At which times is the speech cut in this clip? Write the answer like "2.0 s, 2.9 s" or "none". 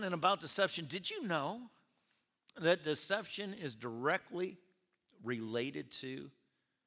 none